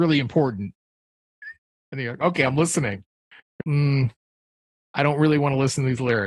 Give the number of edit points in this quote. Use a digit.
1